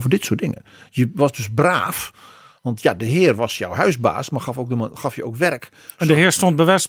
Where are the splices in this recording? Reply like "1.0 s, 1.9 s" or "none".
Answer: none